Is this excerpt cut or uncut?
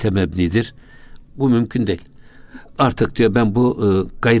cut